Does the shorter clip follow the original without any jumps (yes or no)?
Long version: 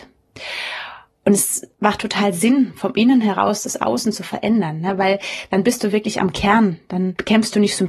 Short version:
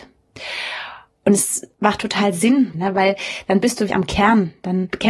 no